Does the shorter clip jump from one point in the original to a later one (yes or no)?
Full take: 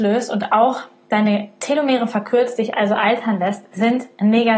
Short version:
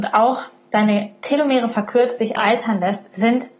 yes